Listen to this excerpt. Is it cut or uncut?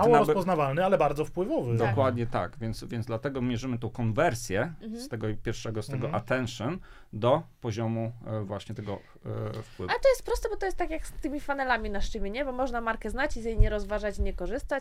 uncut